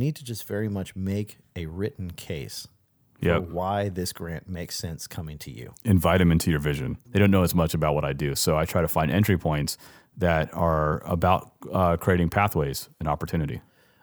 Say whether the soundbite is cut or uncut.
cut